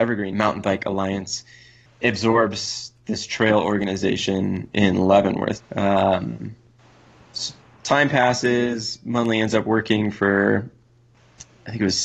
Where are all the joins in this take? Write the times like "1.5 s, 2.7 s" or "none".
5.5 s